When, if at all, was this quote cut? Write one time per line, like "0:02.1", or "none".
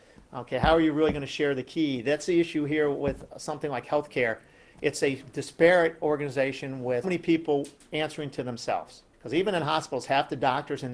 0:07.0
0:09.1